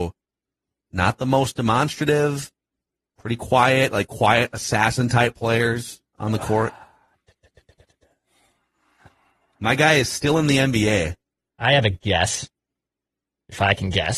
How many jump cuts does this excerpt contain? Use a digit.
0